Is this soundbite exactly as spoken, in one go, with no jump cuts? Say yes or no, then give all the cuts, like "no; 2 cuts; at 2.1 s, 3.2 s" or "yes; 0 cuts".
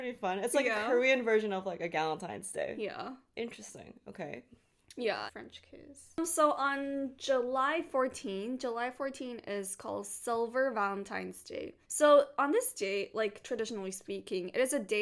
no; 2 cuts; at 5.3 s, 11.8 s